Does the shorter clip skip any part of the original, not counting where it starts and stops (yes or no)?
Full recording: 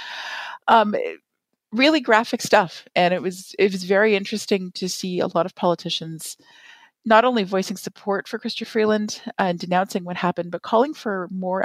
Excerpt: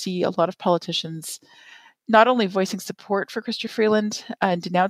no